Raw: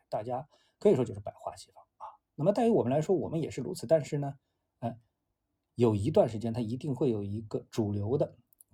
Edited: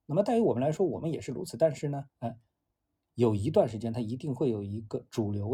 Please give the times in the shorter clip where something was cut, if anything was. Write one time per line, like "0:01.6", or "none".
0:02.1